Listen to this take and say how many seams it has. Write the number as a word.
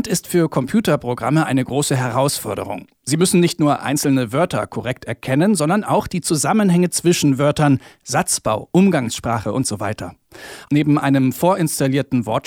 one